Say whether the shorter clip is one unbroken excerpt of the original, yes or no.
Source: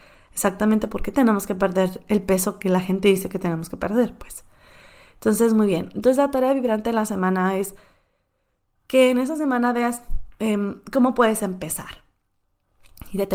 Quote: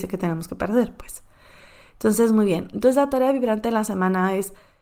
yes